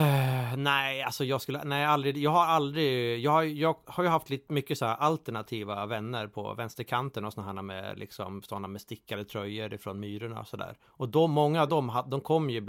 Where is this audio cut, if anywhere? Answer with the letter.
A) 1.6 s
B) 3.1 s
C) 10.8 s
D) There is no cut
D